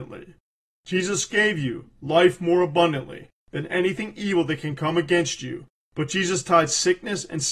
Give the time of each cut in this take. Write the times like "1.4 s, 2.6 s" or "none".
none